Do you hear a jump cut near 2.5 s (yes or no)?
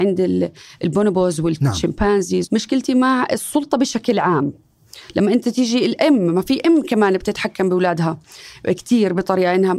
yes